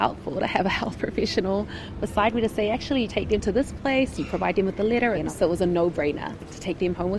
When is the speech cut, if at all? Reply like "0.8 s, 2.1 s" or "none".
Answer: 3.1 s, 5.1 s